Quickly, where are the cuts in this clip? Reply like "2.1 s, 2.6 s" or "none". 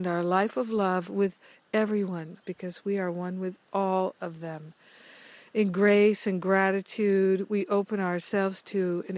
2.4 s